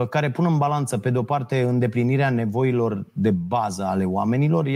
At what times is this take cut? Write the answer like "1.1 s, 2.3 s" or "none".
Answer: none